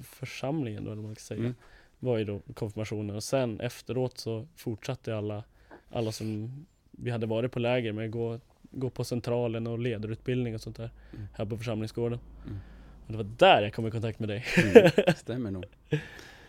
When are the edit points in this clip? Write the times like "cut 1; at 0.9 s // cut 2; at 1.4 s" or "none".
none